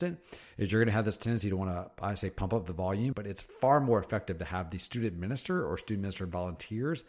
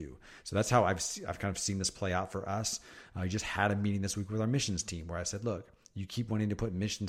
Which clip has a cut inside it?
first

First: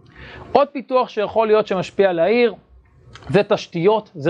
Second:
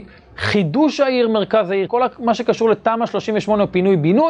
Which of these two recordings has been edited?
second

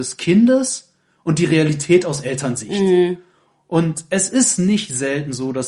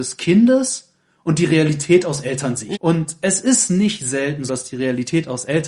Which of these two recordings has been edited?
second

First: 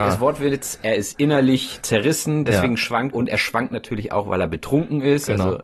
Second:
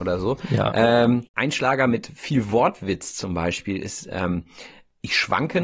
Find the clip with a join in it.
first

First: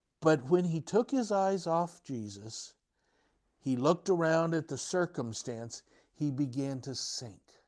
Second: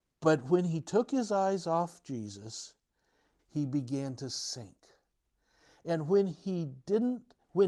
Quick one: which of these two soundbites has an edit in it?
second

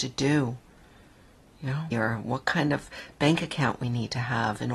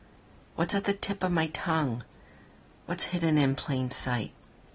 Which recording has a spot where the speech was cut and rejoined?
first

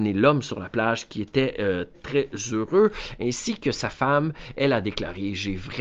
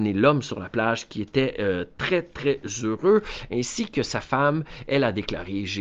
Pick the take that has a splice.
first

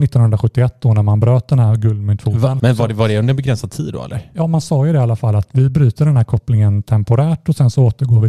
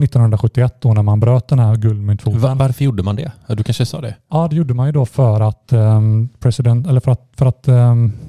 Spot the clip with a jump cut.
first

